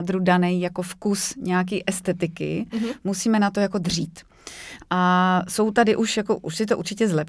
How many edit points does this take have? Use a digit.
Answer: 0